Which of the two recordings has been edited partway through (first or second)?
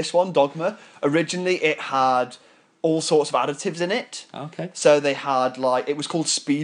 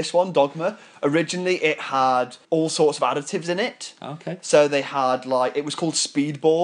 second